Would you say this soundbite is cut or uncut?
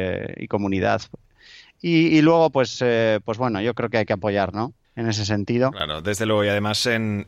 cut